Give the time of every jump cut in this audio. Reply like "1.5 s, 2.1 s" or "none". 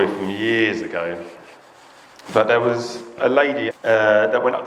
2.3 s, 3.7 s